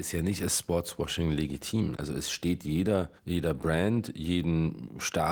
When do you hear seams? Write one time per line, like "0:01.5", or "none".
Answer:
0:02.0
0:03.2